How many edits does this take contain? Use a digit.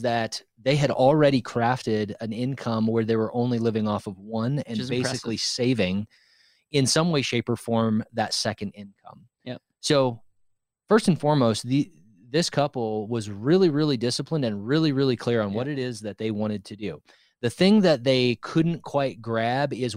0